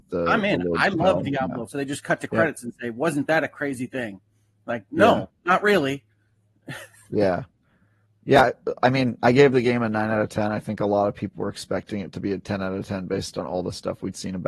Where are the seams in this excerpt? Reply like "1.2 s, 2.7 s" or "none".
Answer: 1.6 s